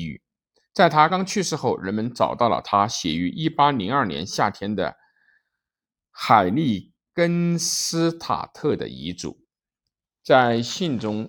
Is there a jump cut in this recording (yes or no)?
yes